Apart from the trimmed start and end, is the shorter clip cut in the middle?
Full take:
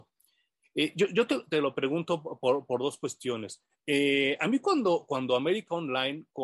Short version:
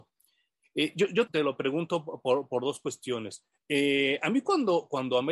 yes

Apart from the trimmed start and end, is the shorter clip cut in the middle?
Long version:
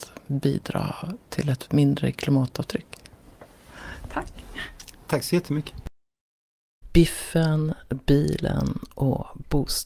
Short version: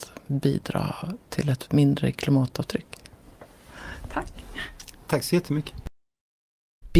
no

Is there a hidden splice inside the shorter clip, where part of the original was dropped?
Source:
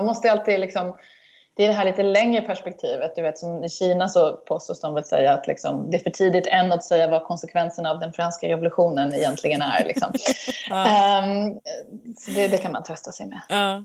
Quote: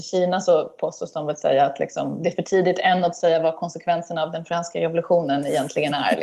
no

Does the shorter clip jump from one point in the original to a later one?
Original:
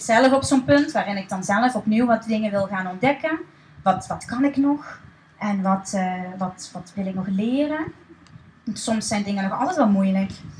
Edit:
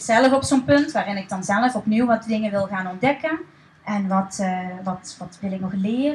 yes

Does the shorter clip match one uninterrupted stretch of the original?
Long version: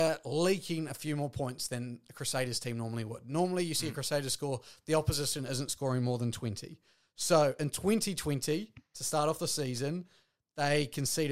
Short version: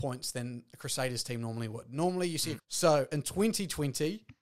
no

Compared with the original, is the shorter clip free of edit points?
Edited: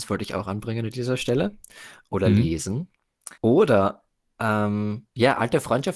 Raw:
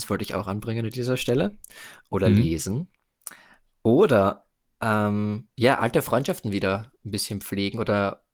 no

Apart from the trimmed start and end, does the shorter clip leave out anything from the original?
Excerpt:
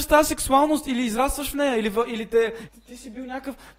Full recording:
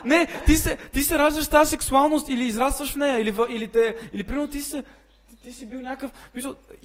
yes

